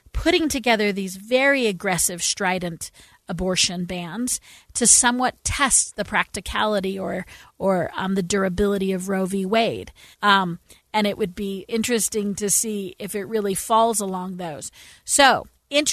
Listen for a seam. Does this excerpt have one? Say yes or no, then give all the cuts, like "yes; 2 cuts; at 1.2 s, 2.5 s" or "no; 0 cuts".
yes; 2 cuts; at 10.1 s, 11.7 s